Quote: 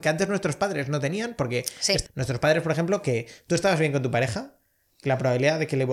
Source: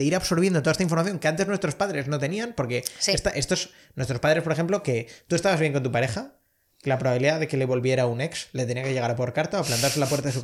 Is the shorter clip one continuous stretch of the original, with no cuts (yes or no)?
no